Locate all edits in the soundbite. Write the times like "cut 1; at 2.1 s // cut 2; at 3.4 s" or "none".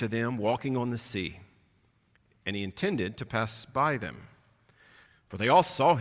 cut 1; at 5.1 s